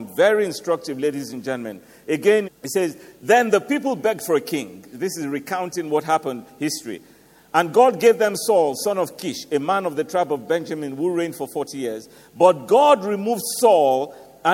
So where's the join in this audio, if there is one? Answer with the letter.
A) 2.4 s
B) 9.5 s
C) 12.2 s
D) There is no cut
A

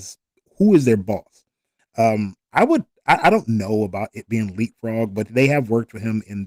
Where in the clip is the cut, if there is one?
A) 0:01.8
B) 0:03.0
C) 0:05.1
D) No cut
A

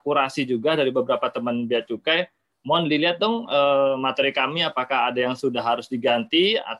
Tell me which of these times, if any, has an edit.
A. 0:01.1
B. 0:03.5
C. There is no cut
C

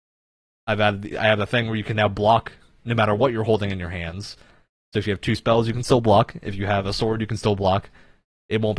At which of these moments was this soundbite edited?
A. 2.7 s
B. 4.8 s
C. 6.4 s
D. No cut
D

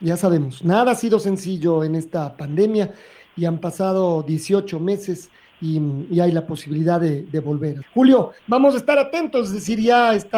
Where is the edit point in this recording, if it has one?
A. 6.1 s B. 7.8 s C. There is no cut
B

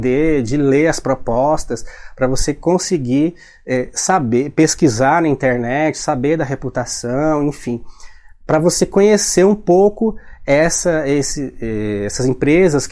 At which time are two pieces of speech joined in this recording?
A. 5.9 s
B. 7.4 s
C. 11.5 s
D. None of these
D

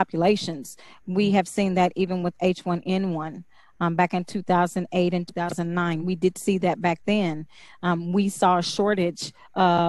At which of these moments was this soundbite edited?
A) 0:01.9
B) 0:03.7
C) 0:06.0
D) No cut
D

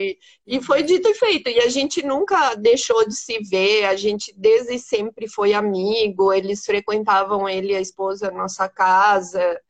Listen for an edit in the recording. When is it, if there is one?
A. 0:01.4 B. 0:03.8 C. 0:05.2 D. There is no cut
D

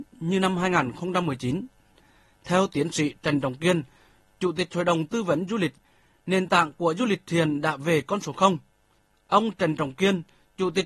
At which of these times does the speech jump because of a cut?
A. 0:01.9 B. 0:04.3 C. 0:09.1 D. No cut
C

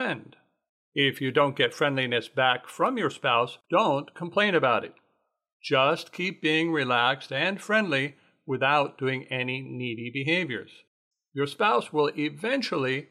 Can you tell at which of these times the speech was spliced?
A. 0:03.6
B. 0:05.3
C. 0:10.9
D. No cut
A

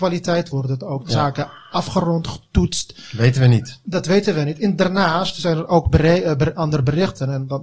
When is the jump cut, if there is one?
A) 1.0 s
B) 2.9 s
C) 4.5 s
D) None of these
D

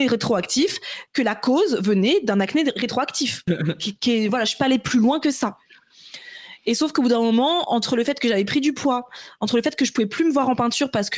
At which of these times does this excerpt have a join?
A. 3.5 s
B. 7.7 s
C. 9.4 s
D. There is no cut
A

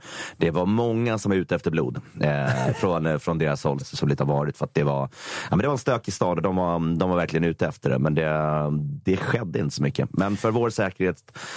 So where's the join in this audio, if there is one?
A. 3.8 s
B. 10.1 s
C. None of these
A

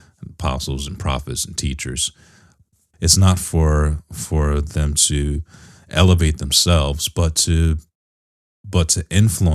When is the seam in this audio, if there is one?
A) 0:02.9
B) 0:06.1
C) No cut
A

